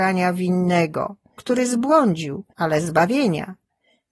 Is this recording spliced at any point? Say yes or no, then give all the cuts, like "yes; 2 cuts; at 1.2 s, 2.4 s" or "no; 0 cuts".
yes; 2 cuts; at 1.4 s, 2.5 s